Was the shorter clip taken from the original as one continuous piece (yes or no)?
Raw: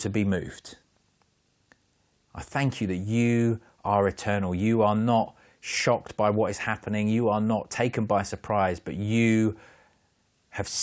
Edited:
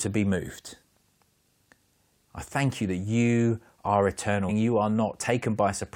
no